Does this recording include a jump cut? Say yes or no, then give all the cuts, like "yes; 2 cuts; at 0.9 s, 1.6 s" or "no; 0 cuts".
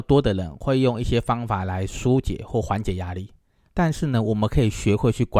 yes; 1 cut; at 3.7 s